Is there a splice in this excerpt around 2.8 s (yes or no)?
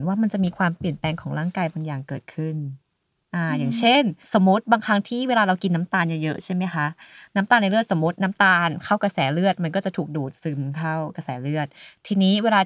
no